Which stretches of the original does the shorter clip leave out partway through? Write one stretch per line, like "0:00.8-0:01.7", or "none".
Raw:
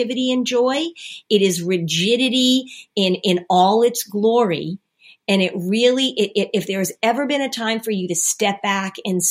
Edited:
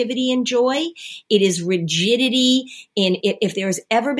0:03.2-0:06.3